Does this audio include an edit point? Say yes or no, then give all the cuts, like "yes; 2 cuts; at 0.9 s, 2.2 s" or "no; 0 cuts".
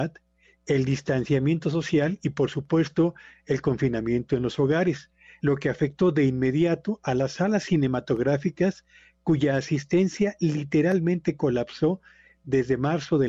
no; 0 cuts